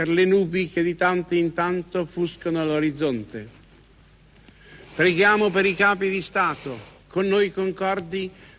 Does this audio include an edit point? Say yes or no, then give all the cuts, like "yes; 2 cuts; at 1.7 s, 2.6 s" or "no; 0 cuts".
no; 0 cuts